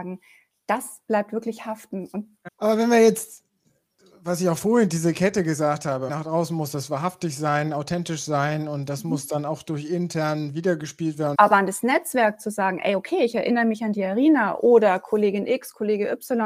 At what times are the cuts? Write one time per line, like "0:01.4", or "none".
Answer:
0:02.5
0:06.1
0:11.3